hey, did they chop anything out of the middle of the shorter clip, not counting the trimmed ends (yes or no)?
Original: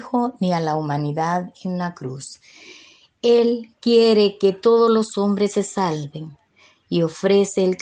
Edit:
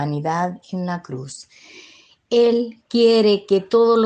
no